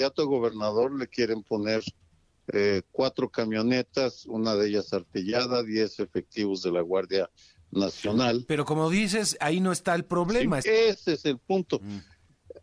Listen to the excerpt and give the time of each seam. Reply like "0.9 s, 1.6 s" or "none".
10.6 s